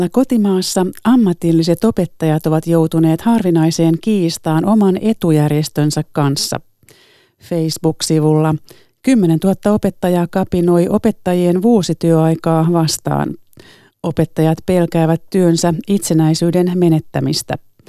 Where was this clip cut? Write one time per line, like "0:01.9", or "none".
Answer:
none